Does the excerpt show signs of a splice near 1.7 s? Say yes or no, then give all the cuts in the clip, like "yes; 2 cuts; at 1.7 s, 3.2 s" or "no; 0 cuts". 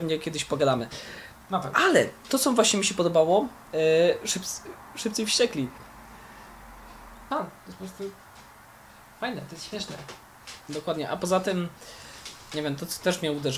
no; 2 cuts; at 7.3 s, 10.6 s